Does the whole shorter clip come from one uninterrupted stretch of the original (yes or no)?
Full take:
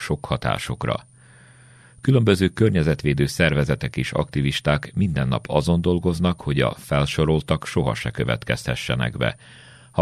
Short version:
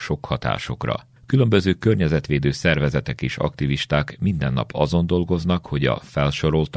no